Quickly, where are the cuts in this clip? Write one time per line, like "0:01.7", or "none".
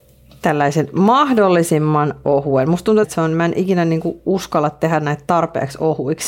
0:03.0